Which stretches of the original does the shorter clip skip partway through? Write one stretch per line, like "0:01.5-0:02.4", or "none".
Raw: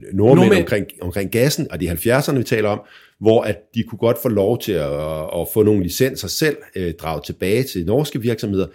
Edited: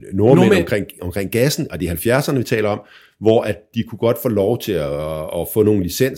none